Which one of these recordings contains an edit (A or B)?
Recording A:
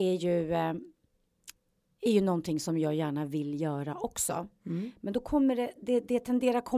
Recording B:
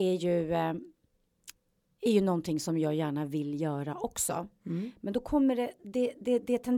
A